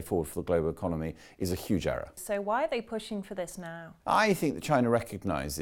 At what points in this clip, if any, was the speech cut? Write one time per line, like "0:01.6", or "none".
0:02.2